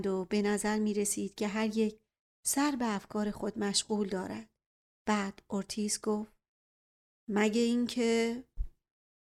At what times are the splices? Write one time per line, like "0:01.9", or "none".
none